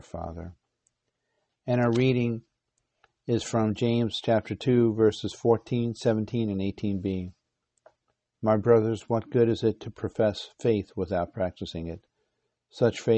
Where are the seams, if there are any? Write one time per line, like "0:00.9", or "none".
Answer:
none